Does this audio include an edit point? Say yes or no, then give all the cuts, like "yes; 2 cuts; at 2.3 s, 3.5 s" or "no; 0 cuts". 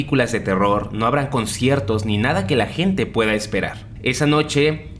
no; 0 cuts